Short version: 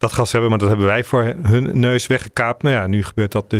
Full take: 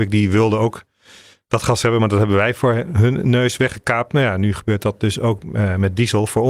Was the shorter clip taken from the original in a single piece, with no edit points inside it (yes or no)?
yes